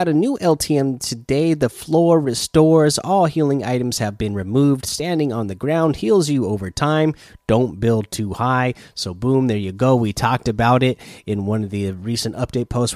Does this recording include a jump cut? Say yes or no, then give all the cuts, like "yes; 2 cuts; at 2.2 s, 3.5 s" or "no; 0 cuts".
no; 0 cuts